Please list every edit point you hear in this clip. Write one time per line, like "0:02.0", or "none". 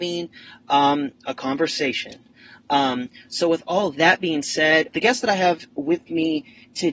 0:04.9